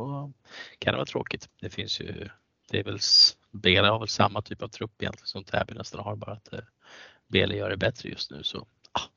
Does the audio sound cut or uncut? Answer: cut